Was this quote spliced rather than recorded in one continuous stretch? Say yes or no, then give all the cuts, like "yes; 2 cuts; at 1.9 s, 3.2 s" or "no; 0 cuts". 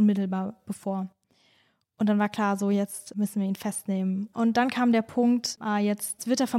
yes; 2 cuts; at 4.3 s, 5.6 s